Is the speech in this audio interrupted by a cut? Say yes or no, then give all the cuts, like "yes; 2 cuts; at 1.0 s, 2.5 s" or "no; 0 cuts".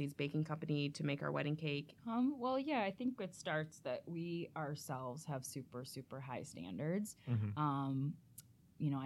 yes; 1 cut; at 2.0 s